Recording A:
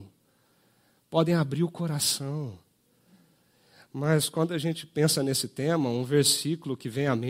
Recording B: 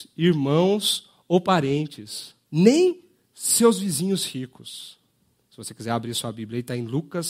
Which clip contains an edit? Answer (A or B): B